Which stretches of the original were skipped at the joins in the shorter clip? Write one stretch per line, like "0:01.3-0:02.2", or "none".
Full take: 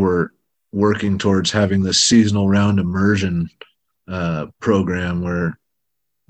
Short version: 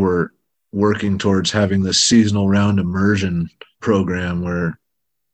0:03.8-0:04.6